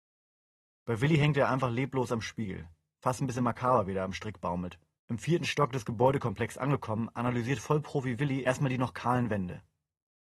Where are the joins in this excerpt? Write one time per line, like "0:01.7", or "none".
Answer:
0:05.0